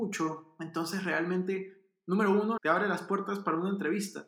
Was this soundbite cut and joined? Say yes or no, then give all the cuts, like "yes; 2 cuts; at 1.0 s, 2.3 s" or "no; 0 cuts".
yes; 1 cut; at 2.6 s